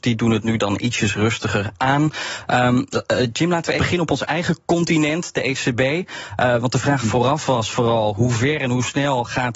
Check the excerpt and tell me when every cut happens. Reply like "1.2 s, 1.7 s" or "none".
3.8 s